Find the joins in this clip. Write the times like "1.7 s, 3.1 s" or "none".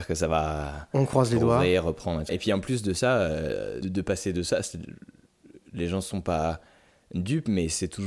2.3 s, 3.8 s